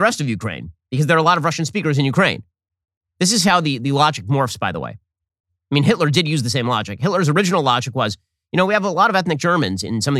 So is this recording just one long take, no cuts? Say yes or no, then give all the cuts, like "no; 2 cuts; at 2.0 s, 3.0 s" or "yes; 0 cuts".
yes; 0 cuts